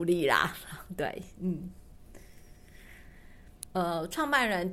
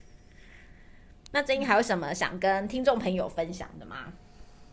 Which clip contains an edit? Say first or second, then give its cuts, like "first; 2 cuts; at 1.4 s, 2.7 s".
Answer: first; 1 cut; at 3.7 s